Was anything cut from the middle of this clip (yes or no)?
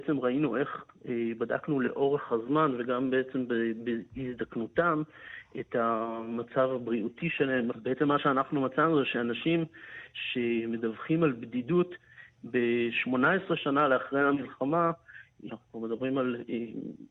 yes